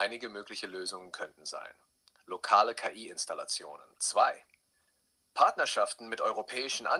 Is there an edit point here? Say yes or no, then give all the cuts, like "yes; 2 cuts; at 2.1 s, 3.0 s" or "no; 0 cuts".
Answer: yes; 2 cuts; at 2.2 s, 3.9 s